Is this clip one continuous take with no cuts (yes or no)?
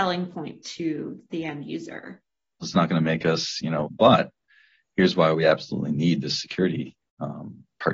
no